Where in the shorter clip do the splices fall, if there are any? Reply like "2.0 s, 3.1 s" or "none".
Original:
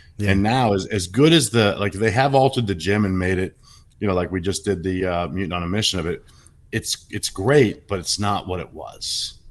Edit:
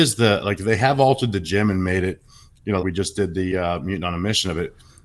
2.8 s

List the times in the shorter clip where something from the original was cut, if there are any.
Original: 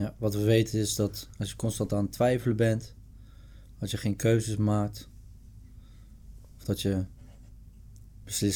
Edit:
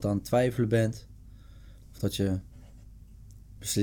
1.8 s

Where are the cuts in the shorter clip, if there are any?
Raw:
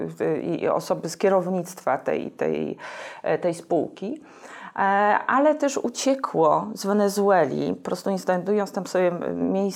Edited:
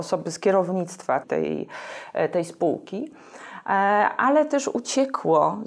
1.2 s

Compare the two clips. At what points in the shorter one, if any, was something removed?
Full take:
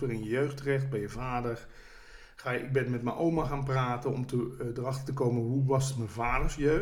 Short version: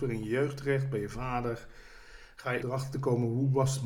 2.6 s

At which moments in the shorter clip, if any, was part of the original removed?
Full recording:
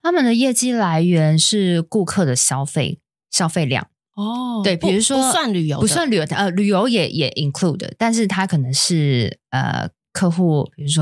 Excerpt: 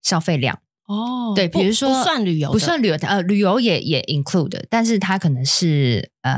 none

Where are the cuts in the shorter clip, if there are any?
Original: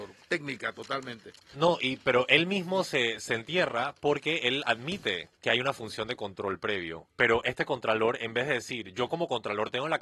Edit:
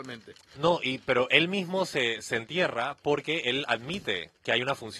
none

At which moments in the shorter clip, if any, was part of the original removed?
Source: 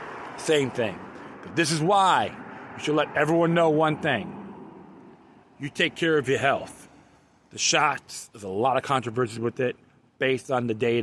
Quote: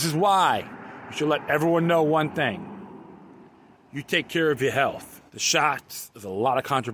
5.3 s

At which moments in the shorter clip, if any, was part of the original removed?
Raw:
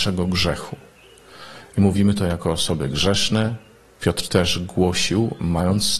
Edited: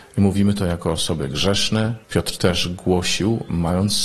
2.0 s

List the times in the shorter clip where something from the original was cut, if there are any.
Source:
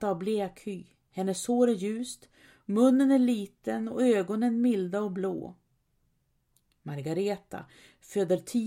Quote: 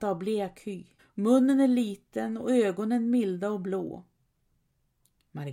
1.0 s

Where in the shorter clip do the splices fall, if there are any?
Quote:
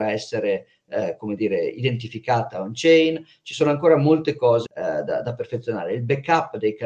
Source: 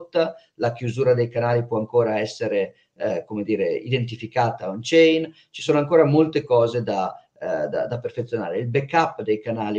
4.7 s

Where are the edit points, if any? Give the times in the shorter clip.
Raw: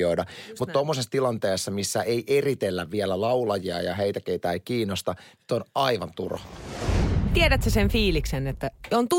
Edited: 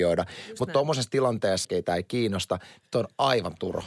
1.6 s

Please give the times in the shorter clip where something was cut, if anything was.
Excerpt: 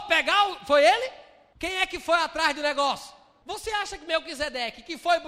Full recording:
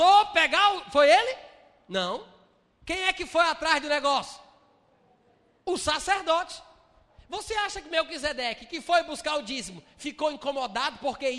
1.5 s, 3.4 s

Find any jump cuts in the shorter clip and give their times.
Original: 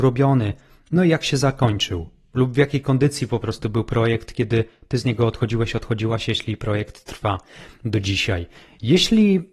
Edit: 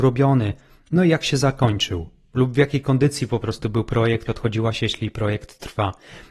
4.3 s

